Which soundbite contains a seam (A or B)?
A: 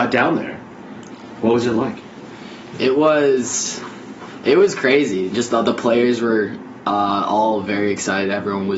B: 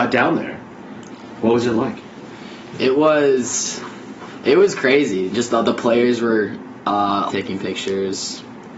B